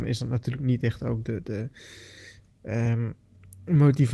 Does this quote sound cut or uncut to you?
uncut